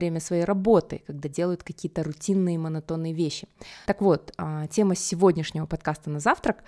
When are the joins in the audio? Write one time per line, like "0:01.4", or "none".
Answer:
0:03.9